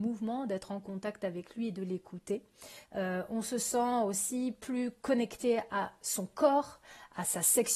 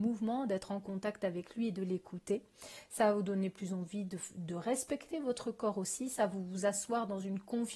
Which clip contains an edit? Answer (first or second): first